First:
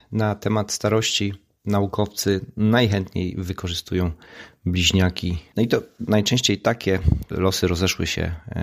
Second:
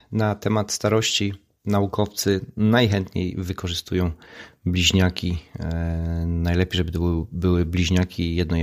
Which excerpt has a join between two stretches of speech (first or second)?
first